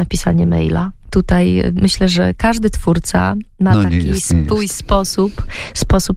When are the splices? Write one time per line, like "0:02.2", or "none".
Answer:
none